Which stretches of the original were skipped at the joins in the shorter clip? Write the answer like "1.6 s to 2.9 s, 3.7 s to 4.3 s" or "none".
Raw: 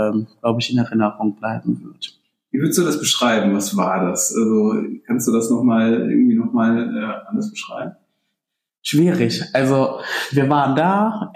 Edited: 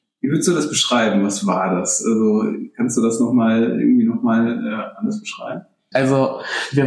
8.2 s to 9.5 s